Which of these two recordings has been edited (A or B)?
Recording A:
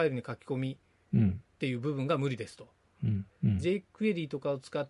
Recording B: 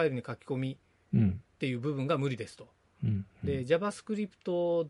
A